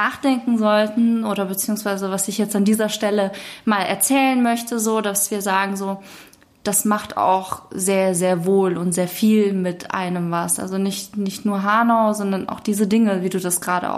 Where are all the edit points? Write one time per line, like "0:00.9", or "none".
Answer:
none

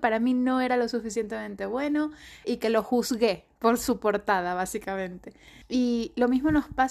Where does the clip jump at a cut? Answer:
0:02.4
0:05.6

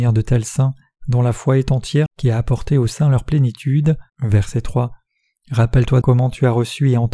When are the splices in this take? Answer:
0:02.1
0:04.1
0:06.0

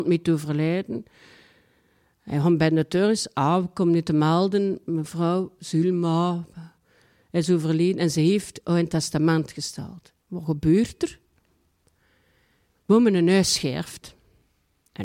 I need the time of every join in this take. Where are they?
0:05.6
0:10.2

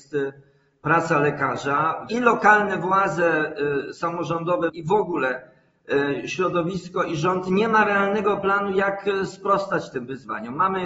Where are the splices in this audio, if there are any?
0:02.1
0:04.7

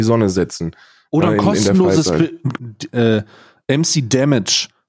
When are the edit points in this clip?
0:02.6

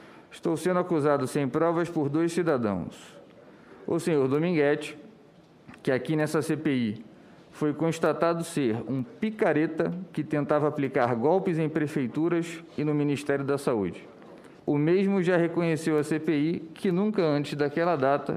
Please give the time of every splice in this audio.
0:14.6

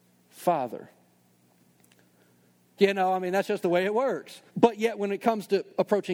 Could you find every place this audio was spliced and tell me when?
0:02.8
0:04.5

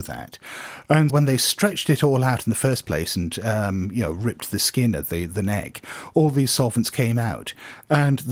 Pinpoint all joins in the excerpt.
0:01.1

